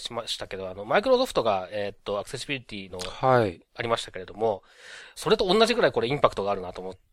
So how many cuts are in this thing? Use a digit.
2